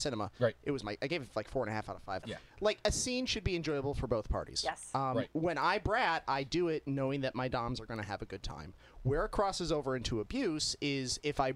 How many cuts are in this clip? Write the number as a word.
one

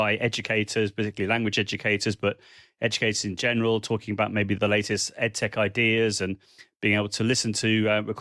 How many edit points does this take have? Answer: zero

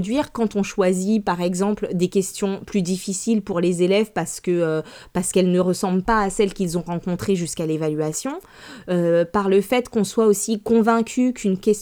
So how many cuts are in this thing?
zero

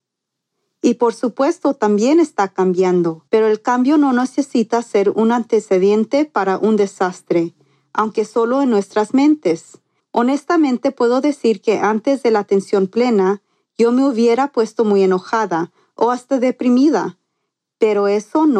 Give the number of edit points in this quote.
two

